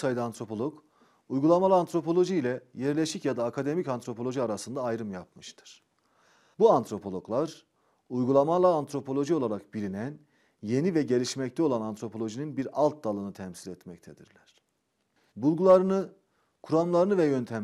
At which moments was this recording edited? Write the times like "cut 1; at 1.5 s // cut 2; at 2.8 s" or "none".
cut 1; at 6.5 s // cut 2; at 15.3 s